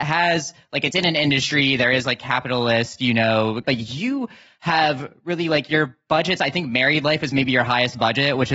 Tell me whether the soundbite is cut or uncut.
cut